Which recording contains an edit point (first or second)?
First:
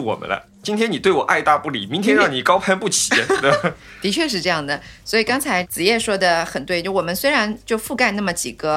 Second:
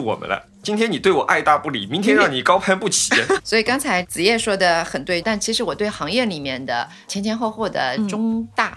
second